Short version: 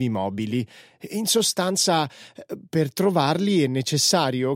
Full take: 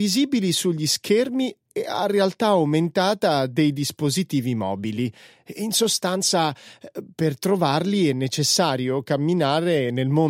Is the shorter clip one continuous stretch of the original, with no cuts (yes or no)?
yes